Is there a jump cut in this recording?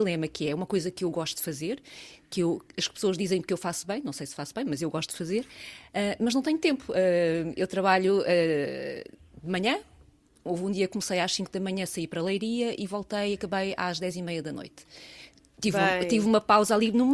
no; 0 cuts

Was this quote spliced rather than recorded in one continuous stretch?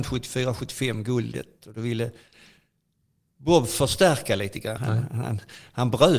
yes; 1 cut; at 4.8 s

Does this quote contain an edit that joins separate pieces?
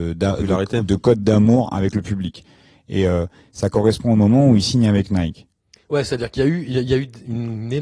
no; 0 cuts

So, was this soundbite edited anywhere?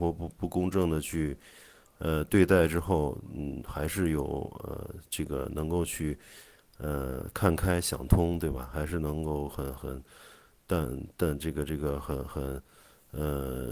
no; 0 cuts

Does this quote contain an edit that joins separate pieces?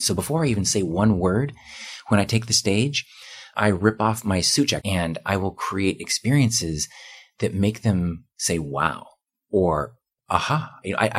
yes; 1 cut; at 4.8 s

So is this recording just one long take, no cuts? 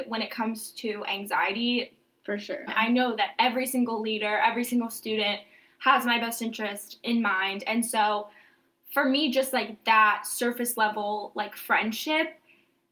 no; 1 cut; at 2.7 s

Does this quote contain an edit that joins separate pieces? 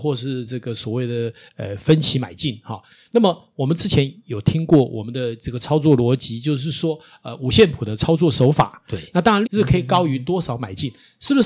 yes; 1 cut; at 9.4 s

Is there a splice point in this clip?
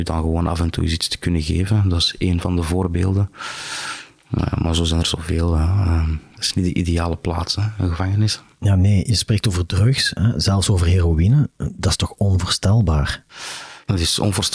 no; 0 cuts

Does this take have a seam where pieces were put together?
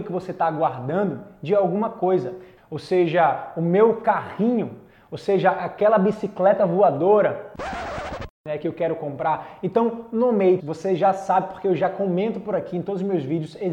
yes; 2 cuts; at 2.6 s, 10.6 s

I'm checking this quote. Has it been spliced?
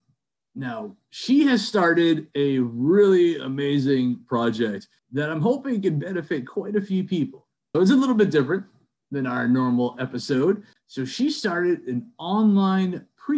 yes; 2 cuts; at 7.7 s, 10.8 s

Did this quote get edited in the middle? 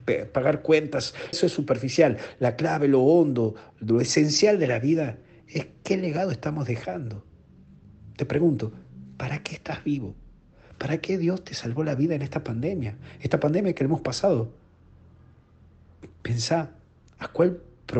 yes; 1 cut; at 1.3 s

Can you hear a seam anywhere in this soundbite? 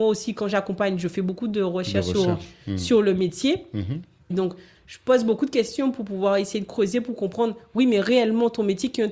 yes; 1 cut; at 4.3 s

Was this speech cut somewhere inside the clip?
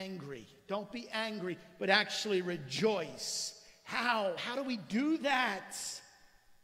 no; 0 cuts

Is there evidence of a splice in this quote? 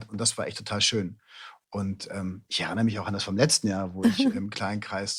no; 0 cuts

